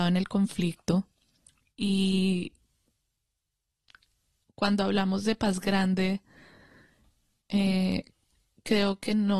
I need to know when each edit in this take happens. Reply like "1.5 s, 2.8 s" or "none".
none